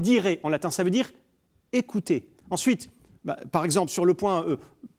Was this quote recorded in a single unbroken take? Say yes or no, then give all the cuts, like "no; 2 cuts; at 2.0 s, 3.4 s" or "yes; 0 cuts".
no; 1 cut; at 2.4 s